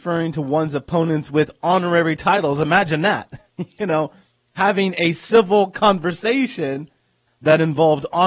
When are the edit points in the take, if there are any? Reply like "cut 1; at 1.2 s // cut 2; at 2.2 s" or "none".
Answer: none